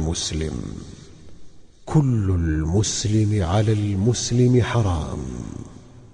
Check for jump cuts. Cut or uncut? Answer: uncut